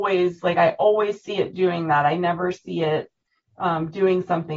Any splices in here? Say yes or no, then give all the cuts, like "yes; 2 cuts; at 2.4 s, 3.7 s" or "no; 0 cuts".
no; 0 cuts